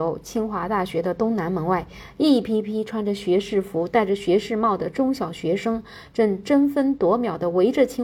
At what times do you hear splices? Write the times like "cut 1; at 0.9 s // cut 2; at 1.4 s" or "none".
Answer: none